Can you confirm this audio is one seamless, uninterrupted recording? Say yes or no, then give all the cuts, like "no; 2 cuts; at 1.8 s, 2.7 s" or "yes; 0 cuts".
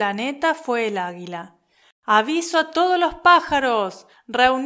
yes; 0 cuts